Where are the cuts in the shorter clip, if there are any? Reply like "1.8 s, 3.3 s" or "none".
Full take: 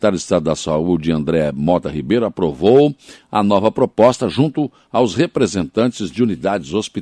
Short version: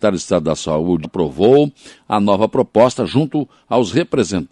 1.0 s